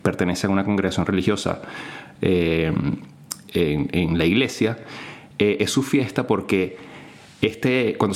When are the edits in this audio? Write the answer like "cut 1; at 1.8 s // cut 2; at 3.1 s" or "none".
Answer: none